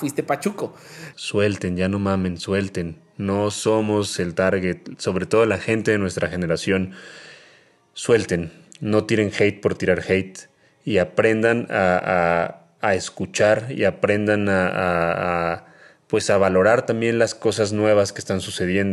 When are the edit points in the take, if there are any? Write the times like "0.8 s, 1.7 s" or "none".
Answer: 1.1 s